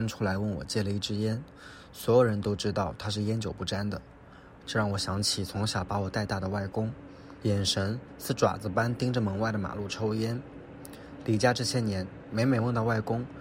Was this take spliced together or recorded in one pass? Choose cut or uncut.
cut